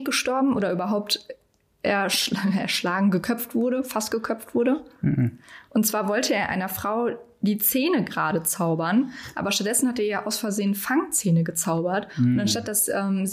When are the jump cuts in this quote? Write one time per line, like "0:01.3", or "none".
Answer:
none